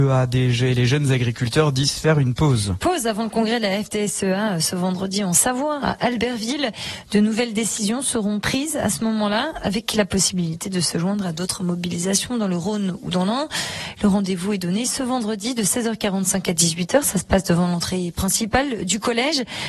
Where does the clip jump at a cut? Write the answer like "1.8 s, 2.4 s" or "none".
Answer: 13.9 s